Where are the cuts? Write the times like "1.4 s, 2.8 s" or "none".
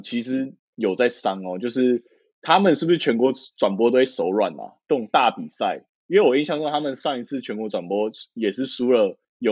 none